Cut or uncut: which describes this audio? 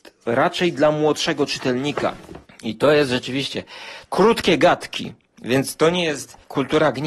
cut